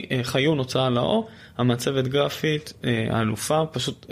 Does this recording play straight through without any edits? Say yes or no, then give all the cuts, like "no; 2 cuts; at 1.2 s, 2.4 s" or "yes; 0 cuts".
yes; 0 cuts